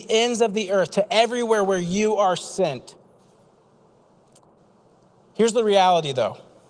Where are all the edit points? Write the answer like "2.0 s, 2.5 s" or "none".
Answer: none